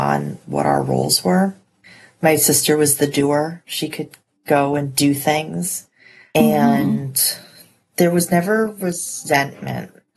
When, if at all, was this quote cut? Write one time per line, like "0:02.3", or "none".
0:06.3